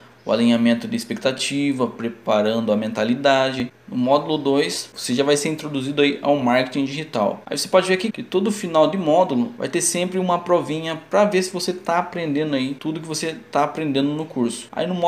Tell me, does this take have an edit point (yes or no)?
yes